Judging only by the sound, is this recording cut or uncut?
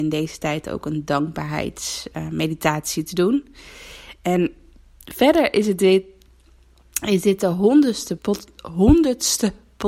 cut